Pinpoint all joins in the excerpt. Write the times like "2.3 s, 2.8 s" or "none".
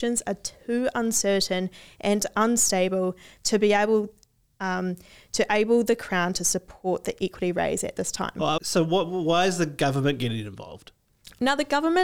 8.6 s